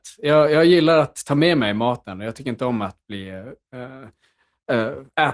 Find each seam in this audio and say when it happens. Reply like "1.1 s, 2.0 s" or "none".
none